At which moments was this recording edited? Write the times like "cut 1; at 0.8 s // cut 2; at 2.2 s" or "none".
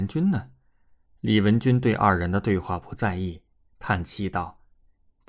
none